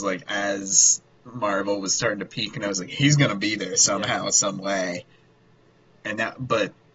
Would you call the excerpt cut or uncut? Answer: uncut